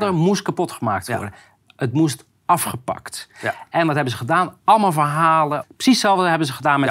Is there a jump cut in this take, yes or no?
yes